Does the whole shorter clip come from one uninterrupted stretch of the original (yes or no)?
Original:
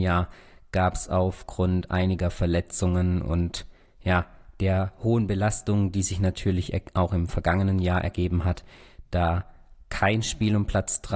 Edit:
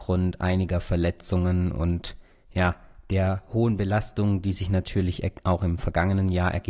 yes